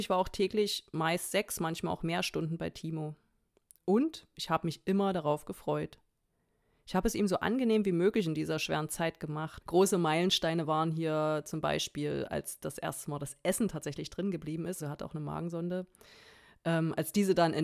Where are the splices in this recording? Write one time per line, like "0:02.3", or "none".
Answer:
0:09.6
0:14.8